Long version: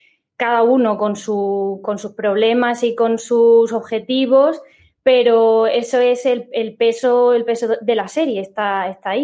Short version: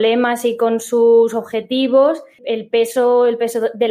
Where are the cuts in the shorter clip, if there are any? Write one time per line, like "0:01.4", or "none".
0:02.4

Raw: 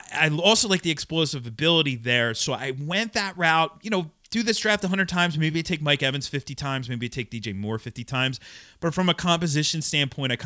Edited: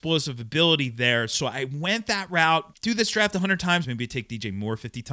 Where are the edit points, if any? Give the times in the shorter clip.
0:02.7
0:03.8

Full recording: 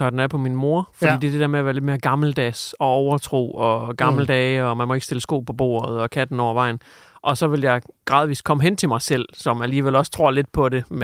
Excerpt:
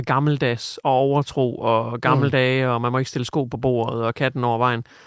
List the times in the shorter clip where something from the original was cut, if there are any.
none

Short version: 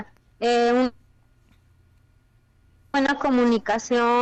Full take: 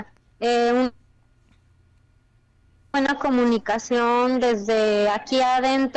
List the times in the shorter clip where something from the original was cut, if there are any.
none

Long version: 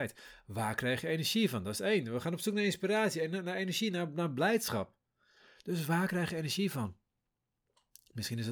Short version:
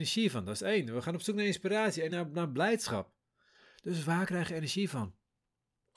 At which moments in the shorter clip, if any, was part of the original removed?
0:02.1

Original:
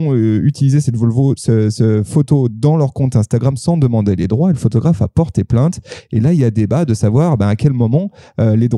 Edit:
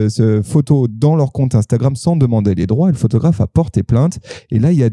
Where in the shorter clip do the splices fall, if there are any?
none

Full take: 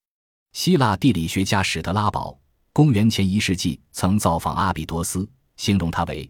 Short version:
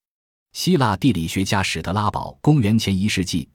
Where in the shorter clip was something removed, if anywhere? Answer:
0:02.4

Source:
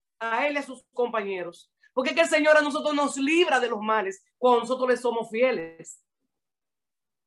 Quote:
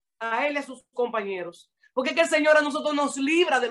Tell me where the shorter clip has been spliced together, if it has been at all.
none

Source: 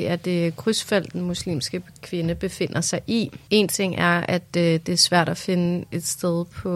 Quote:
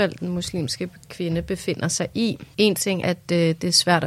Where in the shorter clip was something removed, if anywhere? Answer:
0:03.0

